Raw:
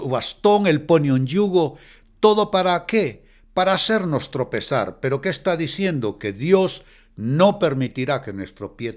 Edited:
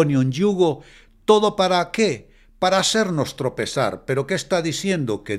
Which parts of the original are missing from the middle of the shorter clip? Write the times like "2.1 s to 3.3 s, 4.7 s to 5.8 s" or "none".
none